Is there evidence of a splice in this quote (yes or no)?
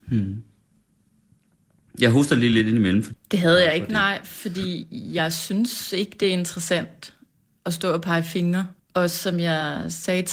yes